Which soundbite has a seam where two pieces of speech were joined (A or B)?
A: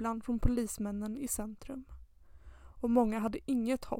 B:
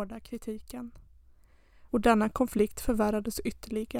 B